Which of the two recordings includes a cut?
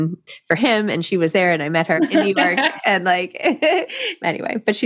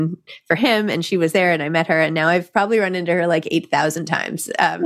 first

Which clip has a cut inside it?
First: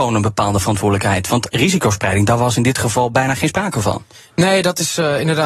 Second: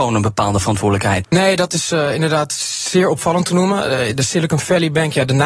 second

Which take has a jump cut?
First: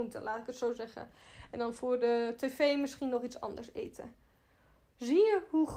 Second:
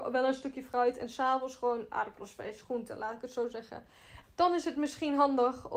second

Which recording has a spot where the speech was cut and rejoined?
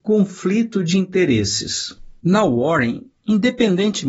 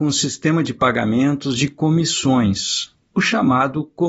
first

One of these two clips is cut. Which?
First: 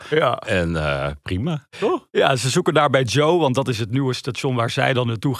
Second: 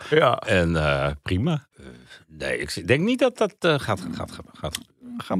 second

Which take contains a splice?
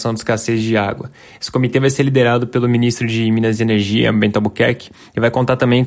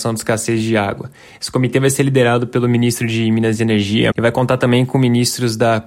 second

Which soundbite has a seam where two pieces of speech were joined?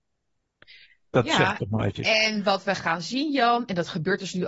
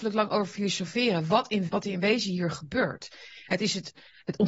second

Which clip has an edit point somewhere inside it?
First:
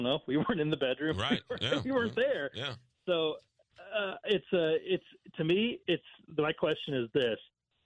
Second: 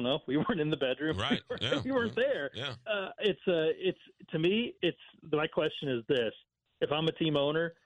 second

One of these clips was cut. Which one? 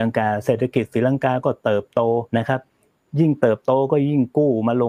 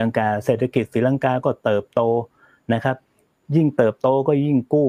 first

